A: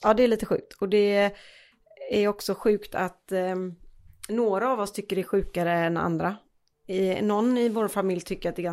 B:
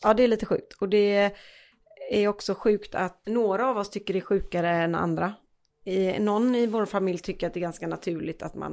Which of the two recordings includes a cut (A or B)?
B